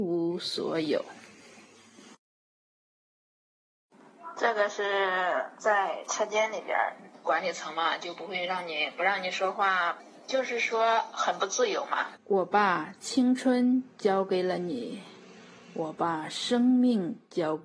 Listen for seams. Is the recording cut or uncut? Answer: cut